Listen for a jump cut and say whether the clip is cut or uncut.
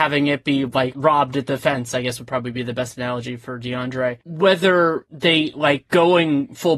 cut